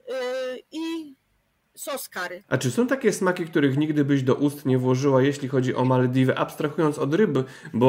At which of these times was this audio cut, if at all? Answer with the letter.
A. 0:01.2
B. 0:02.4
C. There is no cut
B